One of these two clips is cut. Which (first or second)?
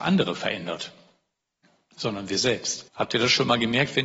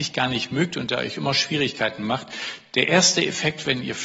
first